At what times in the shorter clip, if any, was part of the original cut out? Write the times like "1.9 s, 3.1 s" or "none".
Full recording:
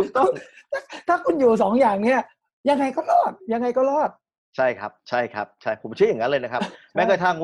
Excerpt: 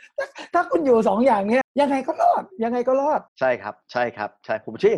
1.6 s, 3.3 s